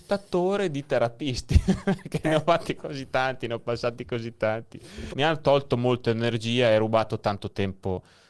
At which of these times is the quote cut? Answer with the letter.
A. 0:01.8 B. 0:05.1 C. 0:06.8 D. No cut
B